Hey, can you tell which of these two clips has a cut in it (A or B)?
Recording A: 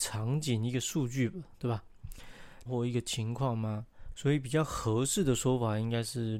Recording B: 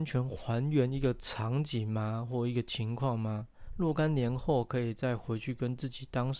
A